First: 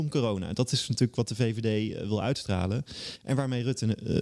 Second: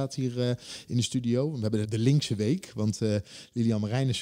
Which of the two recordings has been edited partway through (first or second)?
second